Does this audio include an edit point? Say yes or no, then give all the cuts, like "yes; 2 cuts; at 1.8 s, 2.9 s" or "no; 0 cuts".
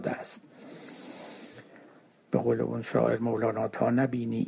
no; 0 cuts